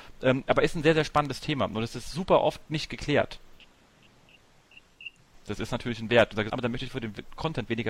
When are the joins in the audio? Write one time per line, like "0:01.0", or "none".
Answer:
0:05.3
0:06.5